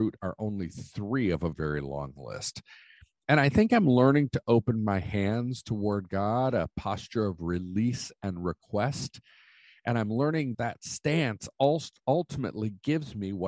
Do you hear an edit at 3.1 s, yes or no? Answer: no